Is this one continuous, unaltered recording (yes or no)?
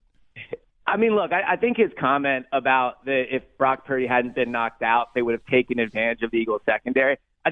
yes